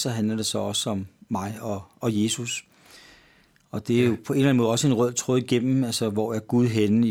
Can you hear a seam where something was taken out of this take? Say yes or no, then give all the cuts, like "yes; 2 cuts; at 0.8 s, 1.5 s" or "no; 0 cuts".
no; 0 cuts